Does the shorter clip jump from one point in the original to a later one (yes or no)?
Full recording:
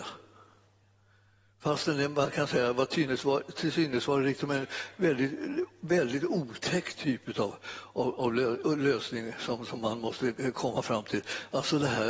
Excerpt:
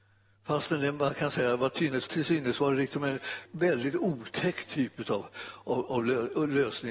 yes